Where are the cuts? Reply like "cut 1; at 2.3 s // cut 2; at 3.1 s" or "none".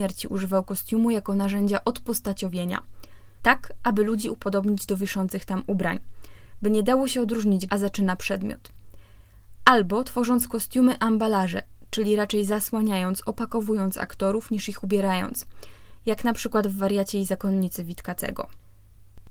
cut 1; at 3.4 s // cut 2; at 7.7 s